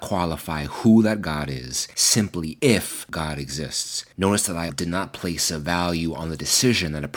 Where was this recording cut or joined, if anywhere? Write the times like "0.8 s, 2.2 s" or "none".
4.7 s